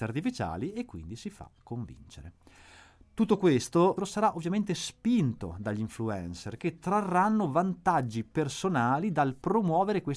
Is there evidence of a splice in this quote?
yes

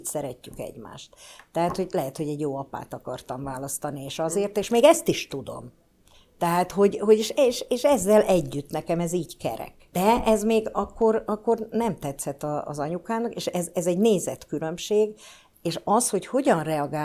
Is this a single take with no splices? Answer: no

